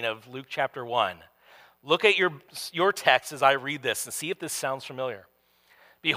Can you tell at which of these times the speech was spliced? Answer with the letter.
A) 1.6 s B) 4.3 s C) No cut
C